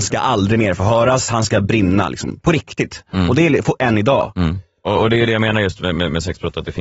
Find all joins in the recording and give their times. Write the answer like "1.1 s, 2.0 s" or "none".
1.3 s, 5.0 s